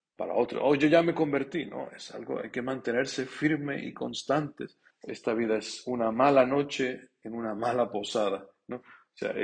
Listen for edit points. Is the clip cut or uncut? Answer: cut